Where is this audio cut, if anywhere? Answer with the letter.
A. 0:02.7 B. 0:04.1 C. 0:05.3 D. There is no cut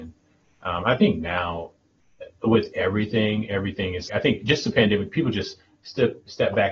B